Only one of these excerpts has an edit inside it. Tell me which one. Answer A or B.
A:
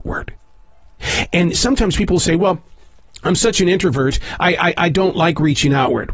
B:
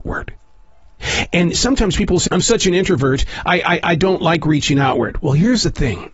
B